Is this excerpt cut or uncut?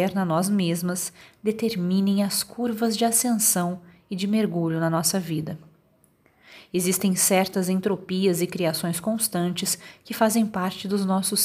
uncut